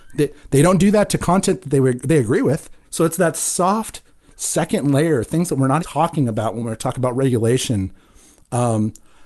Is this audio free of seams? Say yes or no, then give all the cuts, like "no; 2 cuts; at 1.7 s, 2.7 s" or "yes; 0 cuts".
no; 2 cuts; at 2.8 s, 5.8 s